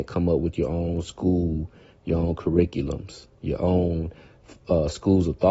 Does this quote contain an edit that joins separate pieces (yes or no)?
no